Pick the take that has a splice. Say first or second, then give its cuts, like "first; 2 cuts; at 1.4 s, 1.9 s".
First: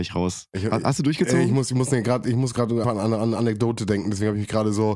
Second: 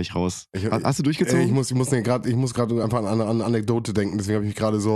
first; 1 cut; at 2.8 s